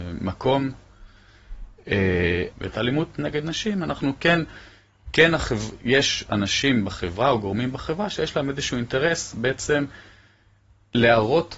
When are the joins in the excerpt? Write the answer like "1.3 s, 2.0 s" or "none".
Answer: 2.5 s